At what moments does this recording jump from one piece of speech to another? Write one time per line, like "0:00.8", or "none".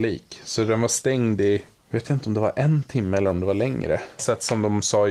0:04.2